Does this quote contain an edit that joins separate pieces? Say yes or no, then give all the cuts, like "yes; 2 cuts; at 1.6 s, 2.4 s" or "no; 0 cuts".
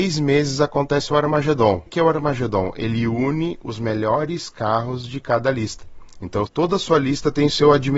yes; 2 cuts; at 1.9 s, 6.5 s